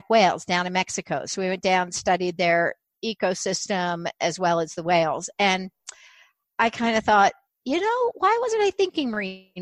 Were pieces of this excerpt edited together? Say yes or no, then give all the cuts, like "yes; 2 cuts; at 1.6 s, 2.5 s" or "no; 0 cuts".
no; 0 cuts